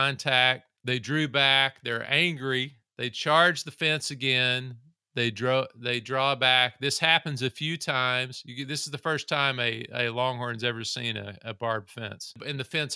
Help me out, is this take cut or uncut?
uncut